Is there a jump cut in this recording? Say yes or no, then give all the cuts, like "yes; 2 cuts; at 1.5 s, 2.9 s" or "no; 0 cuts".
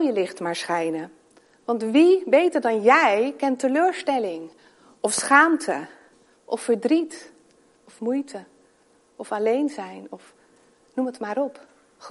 yes; 1 cut; at 7.7 s